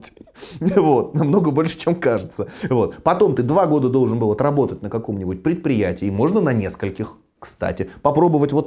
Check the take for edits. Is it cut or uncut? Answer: uncut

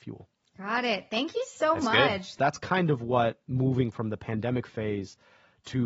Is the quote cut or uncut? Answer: cut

